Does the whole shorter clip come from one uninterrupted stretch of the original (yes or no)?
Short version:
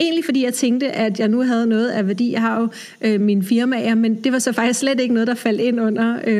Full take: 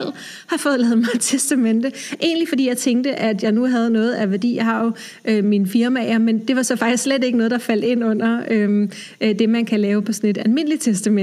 yes